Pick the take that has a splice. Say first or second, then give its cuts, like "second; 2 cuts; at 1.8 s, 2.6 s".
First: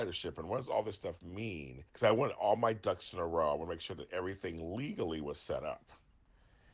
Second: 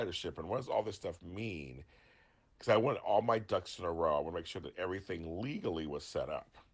first; 1 cut; at 1.9 s